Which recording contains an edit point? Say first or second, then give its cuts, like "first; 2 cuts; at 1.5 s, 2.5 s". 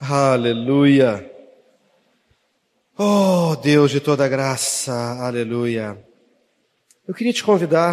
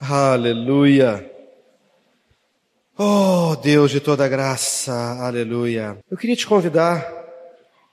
second; 1 cut; at 6.0 s